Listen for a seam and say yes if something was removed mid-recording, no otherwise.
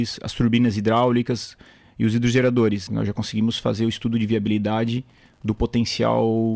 yes